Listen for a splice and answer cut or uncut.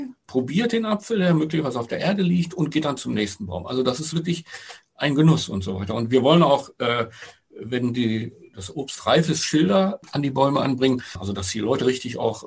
uncut